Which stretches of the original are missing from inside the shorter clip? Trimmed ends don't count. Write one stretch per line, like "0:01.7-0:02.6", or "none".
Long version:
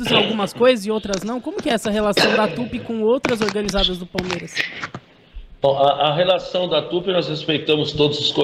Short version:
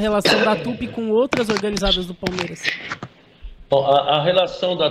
none